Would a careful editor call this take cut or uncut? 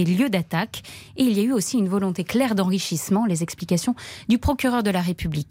uncut